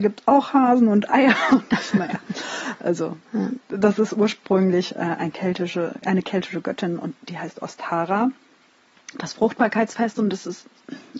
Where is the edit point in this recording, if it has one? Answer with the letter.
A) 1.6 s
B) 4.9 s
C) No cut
C